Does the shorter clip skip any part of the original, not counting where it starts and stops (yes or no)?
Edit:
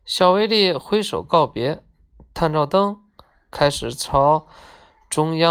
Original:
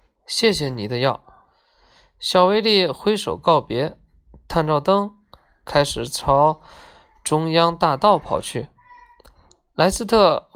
no